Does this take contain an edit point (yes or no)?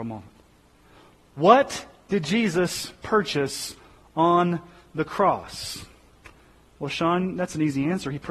no